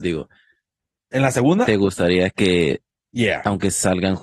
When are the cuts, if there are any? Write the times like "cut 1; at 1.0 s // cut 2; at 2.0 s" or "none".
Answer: none